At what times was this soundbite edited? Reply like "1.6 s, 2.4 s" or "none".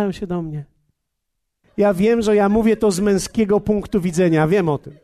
1.6 s